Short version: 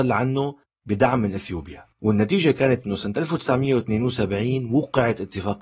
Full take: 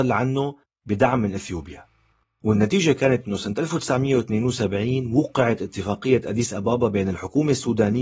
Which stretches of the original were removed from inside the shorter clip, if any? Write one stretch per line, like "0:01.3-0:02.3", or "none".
0:01.9-0:02.3